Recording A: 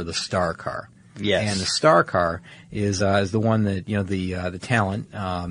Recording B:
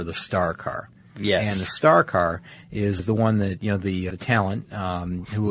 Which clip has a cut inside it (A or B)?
B